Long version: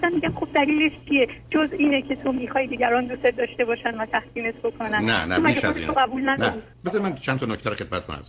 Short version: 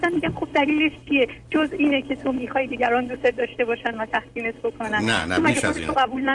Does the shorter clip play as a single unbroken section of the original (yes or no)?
yes